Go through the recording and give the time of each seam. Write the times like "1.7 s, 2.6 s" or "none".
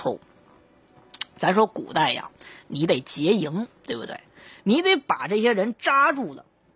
none

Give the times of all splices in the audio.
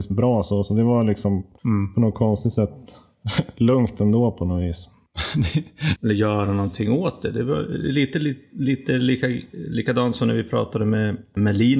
6.0 s

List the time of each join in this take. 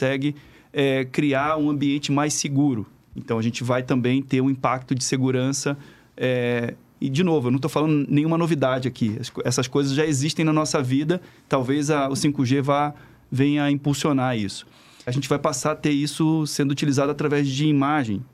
15.1 s

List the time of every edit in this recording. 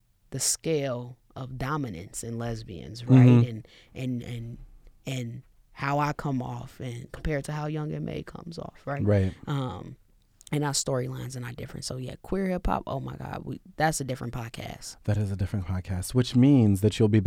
none

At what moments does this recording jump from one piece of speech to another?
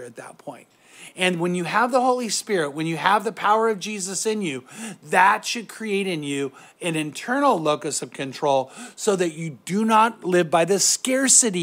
none

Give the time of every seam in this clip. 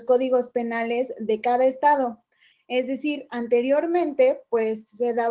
2.5 s

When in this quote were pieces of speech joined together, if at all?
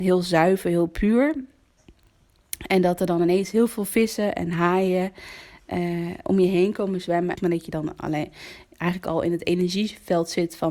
7.4 s

